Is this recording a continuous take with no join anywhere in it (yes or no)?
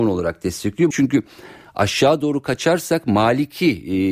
no